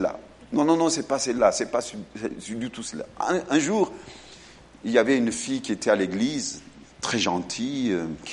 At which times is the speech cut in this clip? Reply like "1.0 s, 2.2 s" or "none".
none